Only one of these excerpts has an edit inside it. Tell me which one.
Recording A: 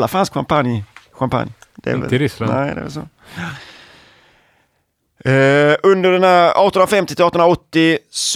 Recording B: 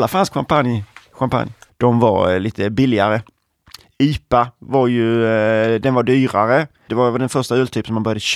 B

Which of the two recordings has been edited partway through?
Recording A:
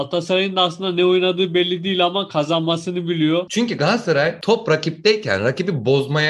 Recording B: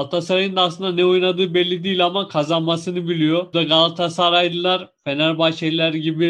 A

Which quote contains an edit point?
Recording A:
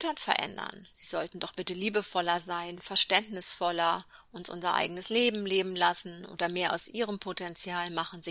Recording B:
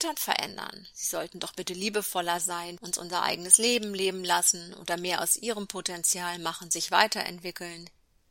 B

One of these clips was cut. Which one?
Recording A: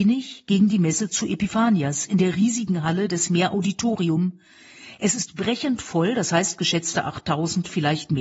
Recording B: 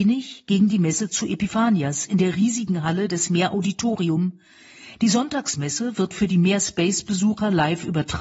B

